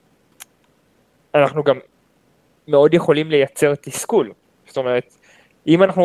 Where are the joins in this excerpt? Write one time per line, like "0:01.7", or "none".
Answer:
none